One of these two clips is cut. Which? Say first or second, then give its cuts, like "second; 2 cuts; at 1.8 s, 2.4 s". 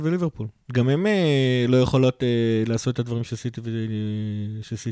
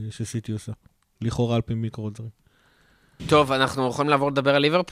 second; 1 cut; at 3.2 s